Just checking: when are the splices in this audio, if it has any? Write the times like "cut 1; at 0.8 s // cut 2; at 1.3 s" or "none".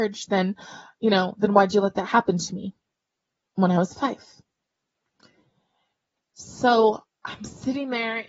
none